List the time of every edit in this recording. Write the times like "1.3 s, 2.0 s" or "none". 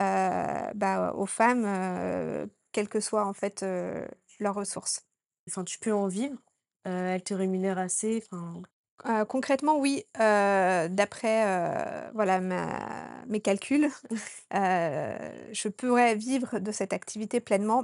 5.5 s

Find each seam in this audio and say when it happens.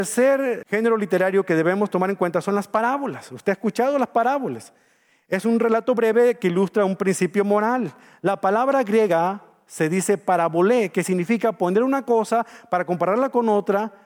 none

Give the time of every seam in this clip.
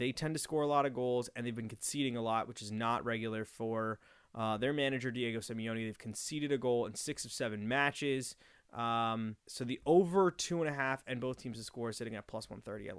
9.4 s

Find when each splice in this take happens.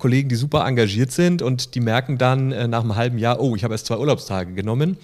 none

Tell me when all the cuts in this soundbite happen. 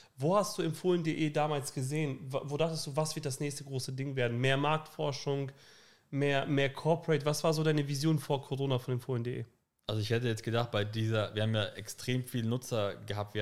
none

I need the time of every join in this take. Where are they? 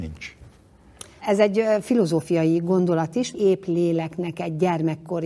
1.2 s, 3.3 s

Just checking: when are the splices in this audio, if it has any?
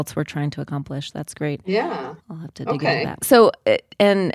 3.2 s

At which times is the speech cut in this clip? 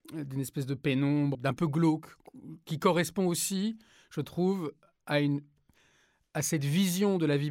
1.3 s

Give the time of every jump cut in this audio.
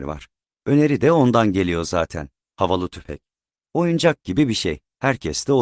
none

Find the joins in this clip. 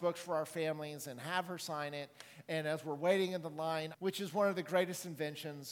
3.9 s

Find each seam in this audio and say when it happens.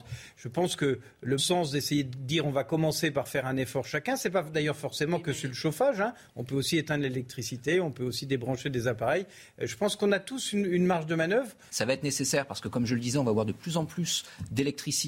1.4 s, 11.7 s

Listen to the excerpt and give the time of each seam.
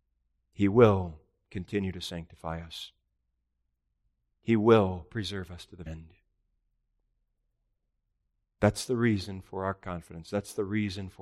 5.9 s

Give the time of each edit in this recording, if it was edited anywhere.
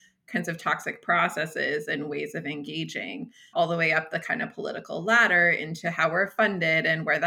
3.5 s

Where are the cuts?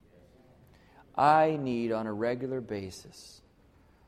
none

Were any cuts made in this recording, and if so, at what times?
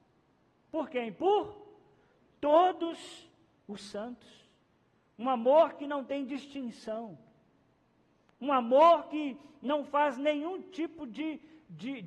none

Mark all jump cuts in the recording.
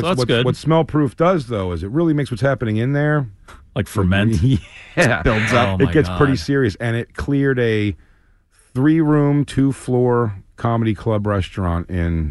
none

